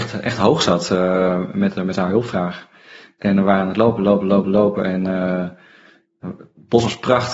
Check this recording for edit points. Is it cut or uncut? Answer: uncut